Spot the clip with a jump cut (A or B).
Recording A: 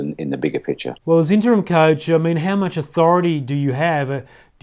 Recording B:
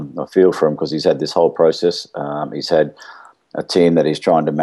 A